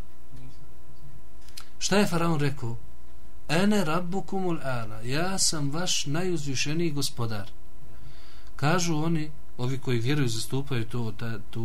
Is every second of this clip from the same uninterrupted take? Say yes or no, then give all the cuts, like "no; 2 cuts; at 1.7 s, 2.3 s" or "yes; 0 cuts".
yes; 0 cuts